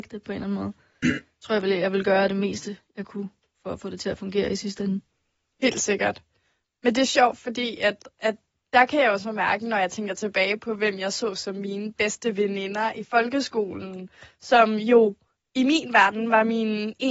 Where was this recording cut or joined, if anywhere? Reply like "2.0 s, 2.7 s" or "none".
none